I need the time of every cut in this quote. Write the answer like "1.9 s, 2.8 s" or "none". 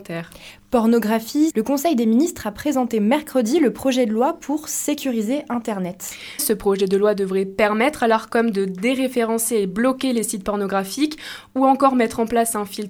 1.5 s, 6.4 s